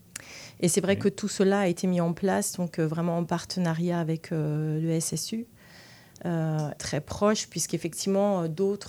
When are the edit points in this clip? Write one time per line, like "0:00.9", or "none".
0:06.8